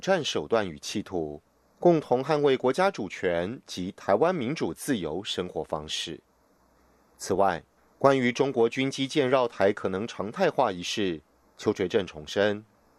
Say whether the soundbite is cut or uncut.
uncut